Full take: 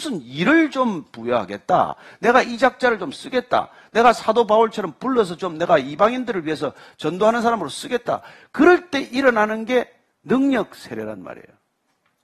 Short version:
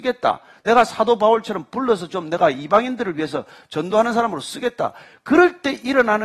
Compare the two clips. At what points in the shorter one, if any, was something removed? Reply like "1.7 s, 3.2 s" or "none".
none

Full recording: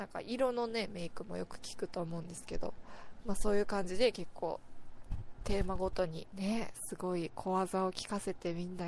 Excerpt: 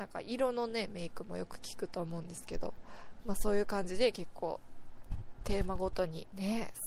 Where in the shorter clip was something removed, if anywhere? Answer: none

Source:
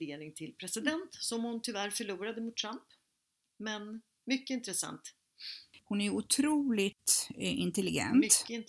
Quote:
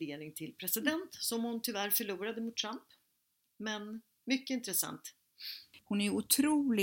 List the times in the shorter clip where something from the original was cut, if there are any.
none

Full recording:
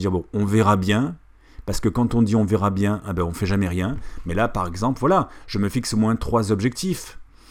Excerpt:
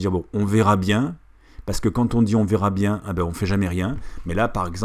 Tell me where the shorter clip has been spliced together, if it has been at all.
none

